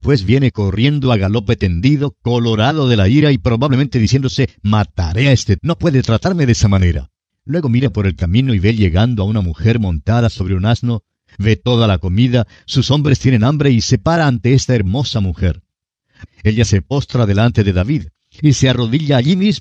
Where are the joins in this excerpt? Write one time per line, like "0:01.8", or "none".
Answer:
0:05.6
0:16.3
0:18.4